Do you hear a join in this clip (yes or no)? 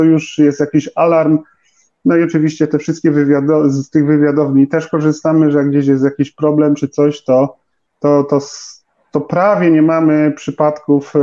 no